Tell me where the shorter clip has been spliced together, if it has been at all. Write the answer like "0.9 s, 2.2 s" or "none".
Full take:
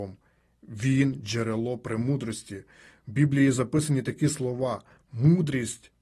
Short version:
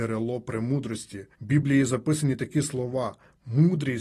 1.3 s